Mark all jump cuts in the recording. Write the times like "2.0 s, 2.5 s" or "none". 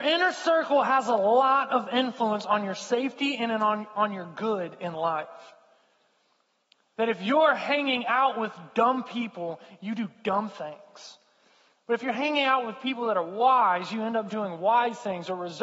none

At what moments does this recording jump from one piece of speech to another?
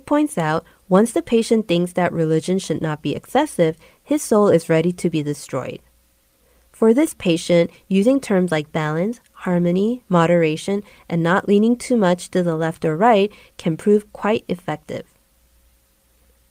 none

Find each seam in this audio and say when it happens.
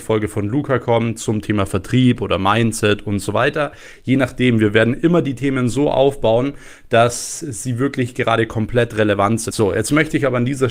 9.5 s

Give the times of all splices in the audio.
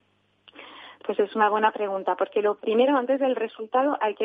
none

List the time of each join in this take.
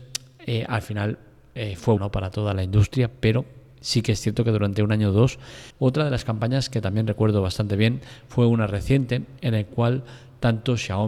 2.0 s, 5.7 s

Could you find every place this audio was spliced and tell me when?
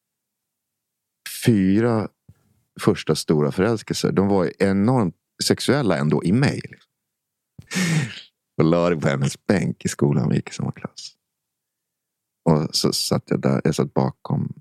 7.7 s

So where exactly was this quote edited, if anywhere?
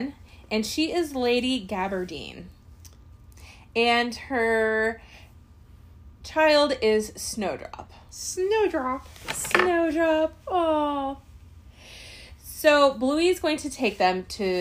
none

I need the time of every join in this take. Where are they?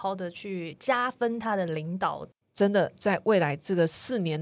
2.4 s

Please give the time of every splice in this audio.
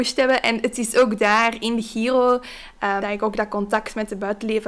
3.0 s

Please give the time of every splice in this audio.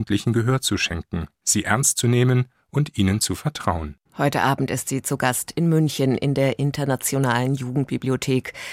4.1 s

